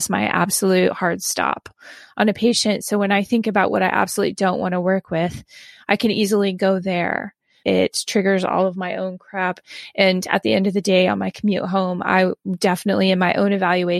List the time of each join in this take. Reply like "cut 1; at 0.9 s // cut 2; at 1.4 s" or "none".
cut 1; at 7.6 s